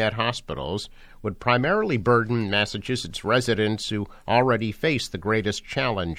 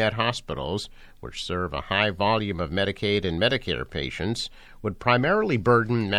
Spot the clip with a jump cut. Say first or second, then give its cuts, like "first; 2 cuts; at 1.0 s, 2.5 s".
first; 1 cut; at 1.1 s